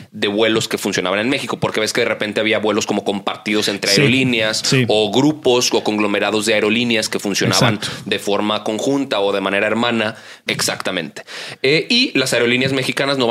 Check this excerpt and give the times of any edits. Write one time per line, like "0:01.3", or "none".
0:10.5